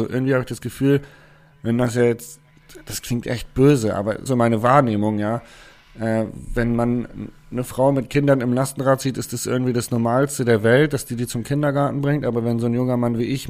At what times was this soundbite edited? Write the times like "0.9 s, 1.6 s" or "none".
4.3 s